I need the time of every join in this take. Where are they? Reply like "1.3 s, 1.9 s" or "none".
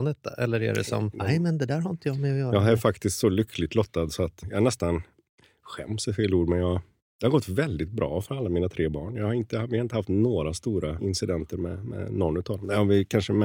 1.1 s